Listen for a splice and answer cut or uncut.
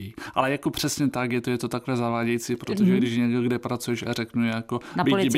uncut